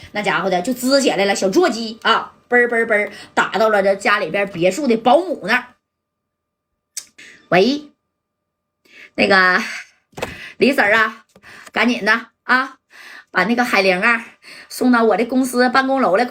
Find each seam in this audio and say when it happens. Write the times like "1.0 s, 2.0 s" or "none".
none